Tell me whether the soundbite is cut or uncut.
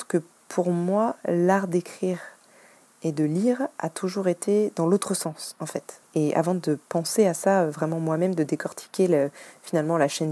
cut